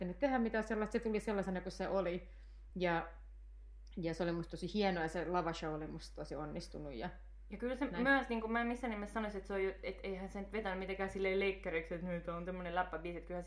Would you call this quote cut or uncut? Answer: uncut